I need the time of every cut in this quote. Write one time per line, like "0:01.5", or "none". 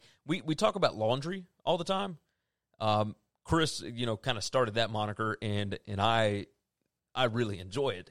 none